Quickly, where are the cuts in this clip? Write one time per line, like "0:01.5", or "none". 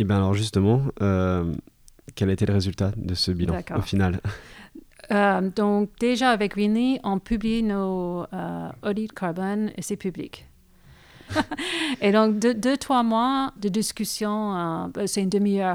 0:11.3
0:13.6